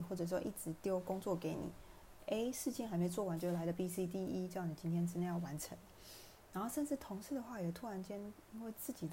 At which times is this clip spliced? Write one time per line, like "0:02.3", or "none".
none